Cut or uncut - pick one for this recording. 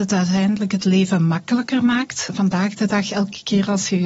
uncut